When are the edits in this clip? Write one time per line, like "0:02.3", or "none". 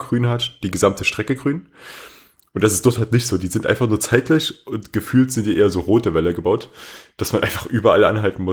none